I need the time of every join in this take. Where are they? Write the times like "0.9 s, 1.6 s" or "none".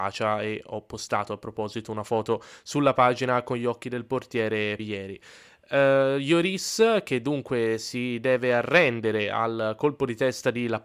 4.8 s